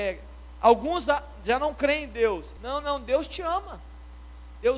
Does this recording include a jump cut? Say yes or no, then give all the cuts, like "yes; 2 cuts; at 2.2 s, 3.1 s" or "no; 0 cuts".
yes; 1 cut; at 2.6 s